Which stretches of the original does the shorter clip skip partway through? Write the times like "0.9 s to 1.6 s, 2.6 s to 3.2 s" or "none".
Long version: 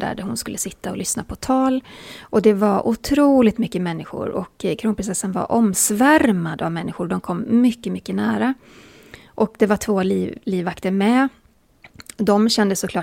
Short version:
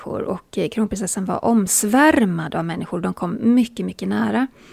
none